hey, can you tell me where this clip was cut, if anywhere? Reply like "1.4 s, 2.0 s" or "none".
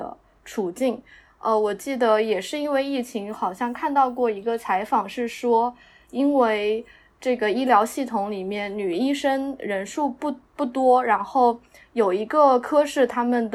10.5 s

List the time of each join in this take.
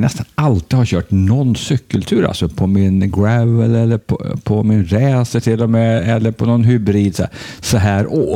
none

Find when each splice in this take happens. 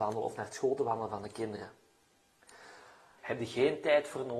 3.2 s

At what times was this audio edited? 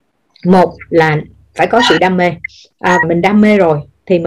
3.0 s

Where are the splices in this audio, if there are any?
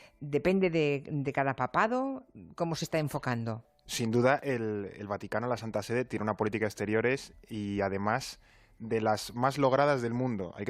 none

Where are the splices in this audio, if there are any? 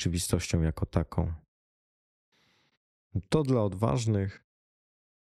none

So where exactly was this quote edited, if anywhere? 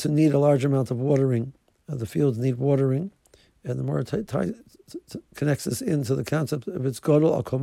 none

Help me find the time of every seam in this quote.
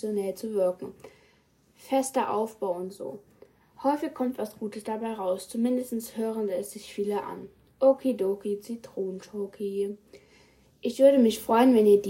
none

